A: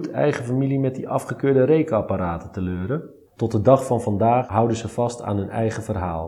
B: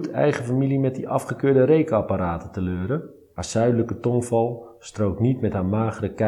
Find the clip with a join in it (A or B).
A